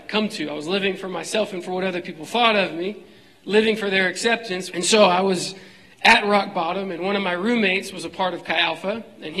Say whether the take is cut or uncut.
cut